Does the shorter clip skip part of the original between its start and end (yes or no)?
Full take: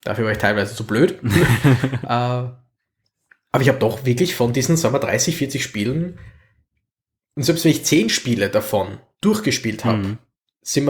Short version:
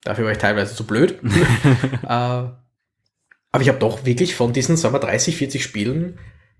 no